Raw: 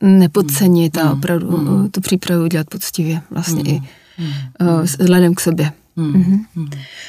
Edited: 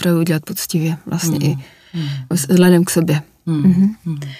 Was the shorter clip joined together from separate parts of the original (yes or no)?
yes